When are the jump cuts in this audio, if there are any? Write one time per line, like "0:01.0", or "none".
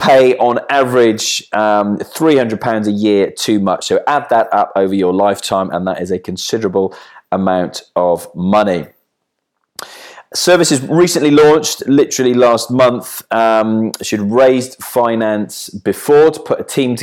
none